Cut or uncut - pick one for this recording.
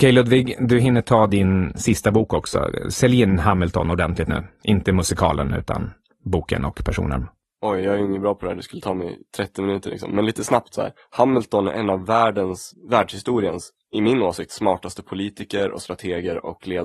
uncut